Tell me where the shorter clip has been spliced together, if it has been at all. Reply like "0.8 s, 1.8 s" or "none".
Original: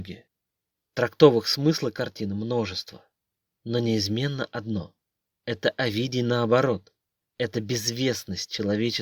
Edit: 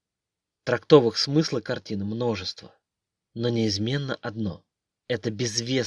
5.0 s